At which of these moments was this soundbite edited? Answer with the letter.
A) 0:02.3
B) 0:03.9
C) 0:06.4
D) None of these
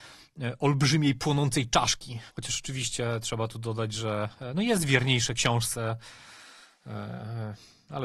A